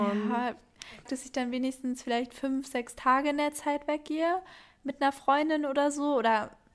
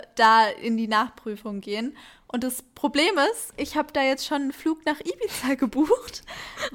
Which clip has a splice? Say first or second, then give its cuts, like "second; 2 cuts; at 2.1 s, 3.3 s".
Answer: first; 1 cut; at 1.1 s